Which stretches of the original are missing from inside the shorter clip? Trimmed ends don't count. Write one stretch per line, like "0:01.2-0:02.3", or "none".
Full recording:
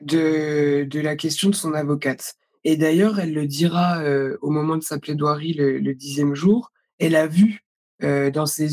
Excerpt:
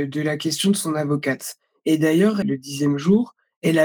0:03.2-0:05.8